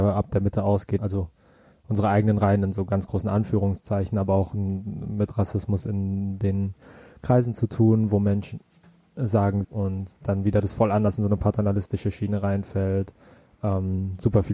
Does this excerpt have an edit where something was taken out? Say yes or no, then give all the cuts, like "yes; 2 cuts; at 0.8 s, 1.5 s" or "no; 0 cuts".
yes; 2 cuts; at 1.0 s, 9.6 s